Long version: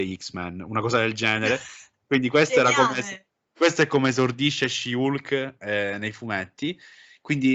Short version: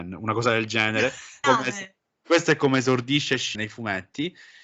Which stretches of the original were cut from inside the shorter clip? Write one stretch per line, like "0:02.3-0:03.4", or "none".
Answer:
0:01.9-0:02.7
0:04.9-0:06.0